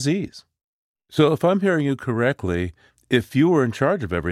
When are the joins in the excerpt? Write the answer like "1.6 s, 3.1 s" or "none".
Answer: 1.0 s